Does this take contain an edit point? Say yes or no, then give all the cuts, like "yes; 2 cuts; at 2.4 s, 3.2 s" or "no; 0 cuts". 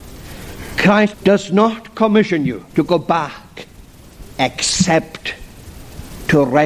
yes; 2 cuts; at 1.1 s, 2.7 s